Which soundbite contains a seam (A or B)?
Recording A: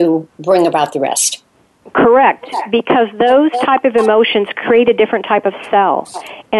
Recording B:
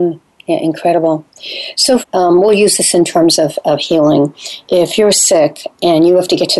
B